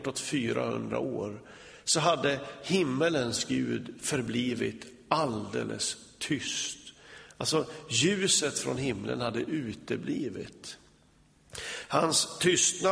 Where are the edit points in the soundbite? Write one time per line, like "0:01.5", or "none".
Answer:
none